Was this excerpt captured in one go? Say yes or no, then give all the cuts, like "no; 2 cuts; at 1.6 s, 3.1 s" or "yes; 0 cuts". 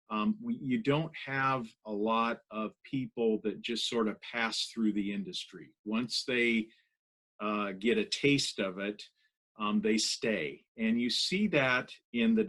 yes; 0 cuts